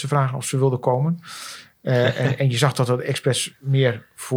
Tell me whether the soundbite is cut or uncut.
uncut